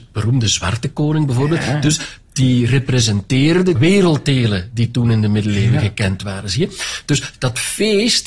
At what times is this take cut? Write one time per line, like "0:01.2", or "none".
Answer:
0:03.8